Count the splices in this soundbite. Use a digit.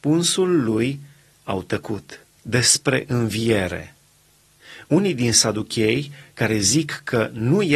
1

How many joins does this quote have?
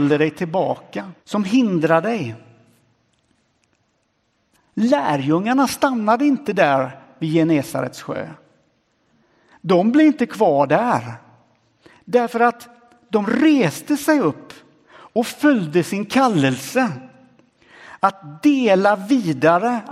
1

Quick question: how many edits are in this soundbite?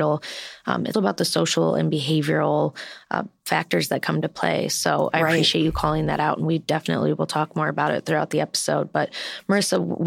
1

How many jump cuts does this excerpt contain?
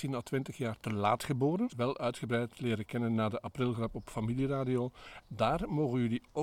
2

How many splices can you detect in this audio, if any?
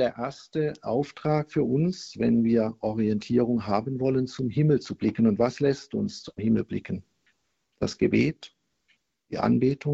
0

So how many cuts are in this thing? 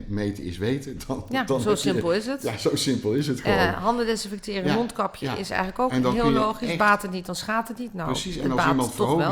0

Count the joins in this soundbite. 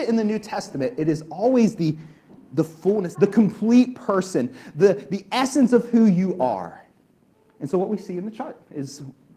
1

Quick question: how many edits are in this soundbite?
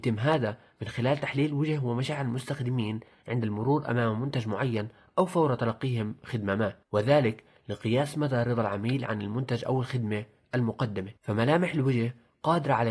2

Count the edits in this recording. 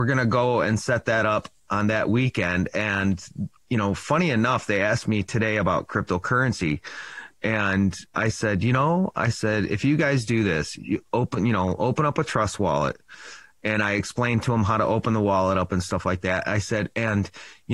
0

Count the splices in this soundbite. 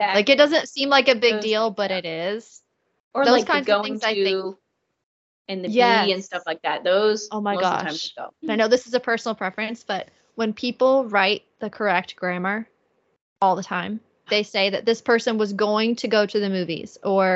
2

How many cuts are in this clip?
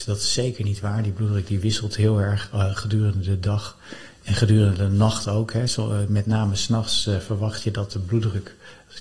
0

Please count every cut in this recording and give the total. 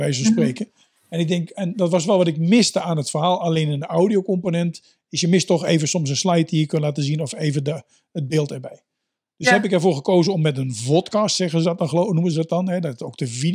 0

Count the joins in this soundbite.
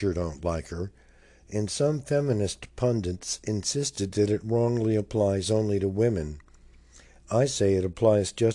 0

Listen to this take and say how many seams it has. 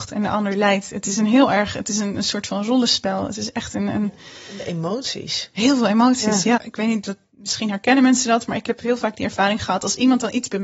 1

